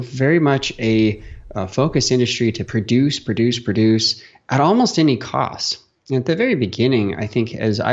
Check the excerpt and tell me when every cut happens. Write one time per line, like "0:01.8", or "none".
none